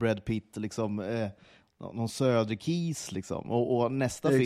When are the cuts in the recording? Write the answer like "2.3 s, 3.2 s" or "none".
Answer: none